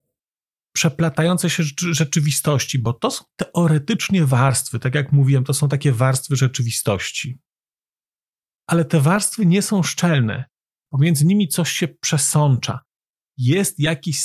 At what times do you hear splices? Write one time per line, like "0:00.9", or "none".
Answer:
none

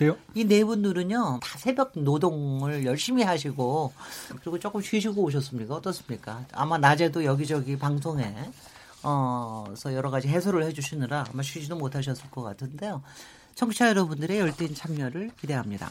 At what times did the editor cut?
0:01.4
0:13.5

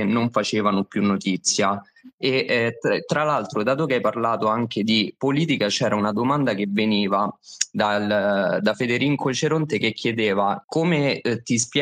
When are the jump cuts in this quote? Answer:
0:10.6

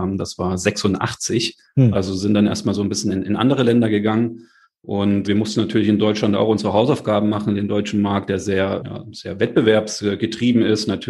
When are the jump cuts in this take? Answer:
0:01.9
0:05.2
0:08.8

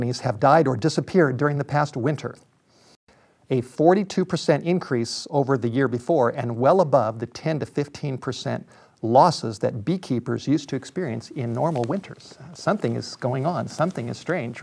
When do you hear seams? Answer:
none

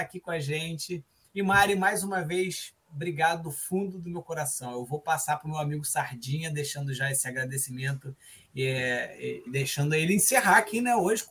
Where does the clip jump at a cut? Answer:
0:09.5

